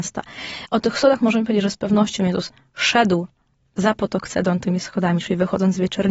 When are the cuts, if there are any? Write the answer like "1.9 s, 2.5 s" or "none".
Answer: none